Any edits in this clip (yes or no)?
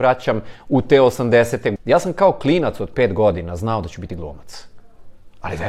yes